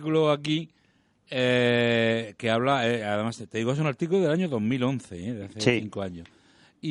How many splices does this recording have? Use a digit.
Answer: 0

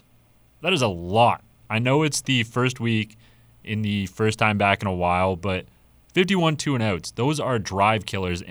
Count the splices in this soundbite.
0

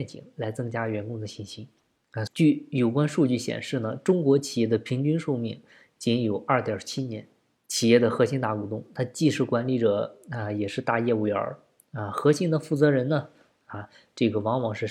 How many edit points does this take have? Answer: 2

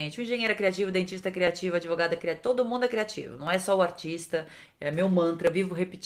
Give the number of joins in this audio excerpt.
0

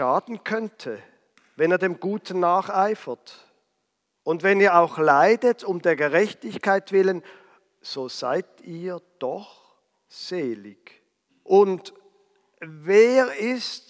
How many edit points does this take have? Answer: 1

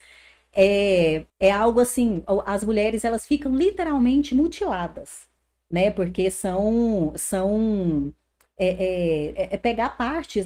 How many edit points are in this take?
2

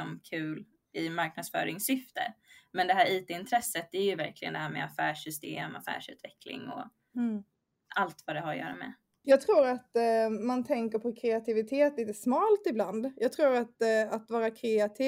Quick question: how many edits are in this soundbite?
1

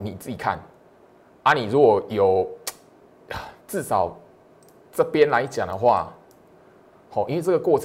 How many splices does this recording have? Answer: 2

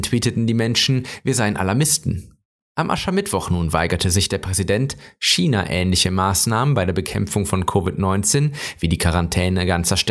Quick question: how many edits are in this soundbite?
0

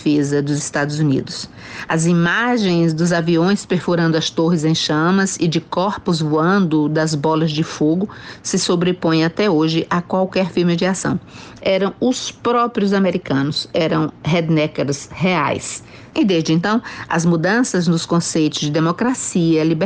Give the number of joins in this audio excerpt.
2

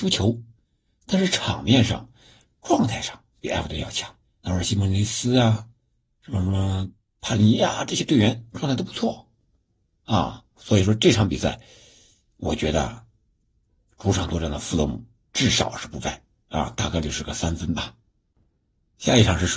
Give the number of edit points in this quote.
1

